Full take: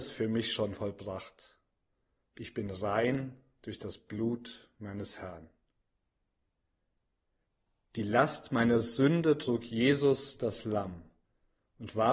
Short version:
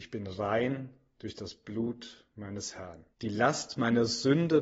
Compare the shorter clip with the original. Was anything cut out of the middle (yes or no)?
yes